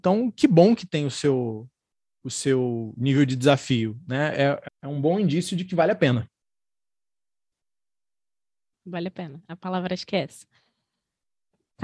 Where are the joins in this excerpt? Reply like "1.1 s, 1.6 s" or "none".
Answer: 4.7 s, 8.7 s